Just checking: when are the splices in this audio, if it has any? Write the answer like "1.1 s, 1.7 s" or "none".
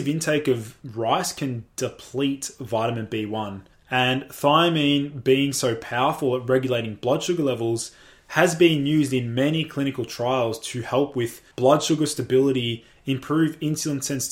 3.7 s, 11.5 s